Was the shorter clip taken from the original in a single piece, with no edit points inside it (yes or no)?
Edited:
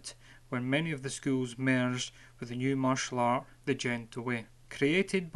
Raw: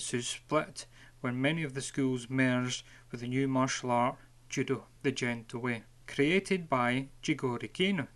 no